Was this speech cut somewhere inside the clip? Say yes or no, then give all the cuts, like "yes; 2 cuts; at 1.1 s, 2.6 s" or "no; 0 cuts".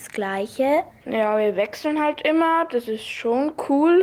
no; 0 cuts